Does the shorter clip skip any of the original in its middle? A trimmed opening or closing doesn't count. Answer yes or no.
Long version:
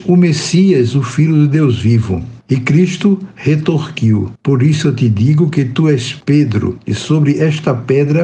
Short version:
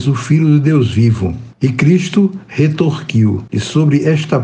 yes